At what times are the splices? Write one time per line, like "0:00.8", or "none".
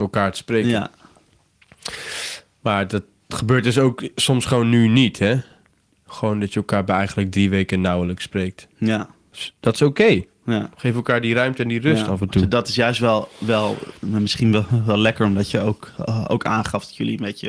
none